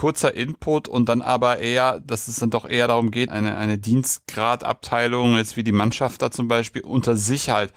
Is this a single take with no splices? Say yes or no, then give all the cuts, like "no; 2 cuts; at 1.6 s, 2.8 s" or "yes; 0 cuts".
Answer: no; 1 cut; at 3.3 s